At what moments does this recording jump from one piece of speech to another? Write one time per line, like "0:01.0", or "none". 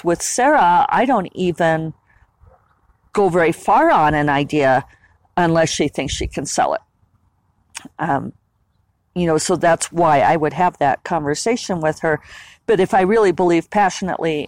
none